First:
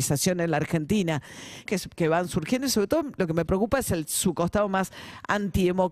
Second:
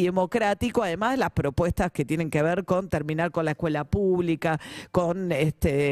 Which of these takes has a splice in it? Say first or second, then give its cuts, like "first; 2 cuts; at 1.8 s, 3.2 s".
first; 1 cut; at 1.7 s